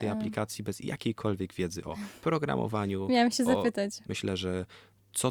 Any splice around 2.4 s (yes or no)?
no